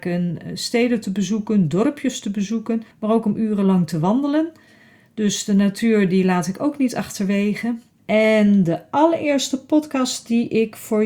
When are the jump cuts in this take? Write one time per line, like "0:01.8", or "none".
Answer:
0:02.9
0:08.0